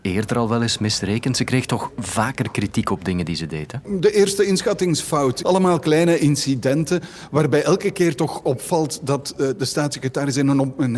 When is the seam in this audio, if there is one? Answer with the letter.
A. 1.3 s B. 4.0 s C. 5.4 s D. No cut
C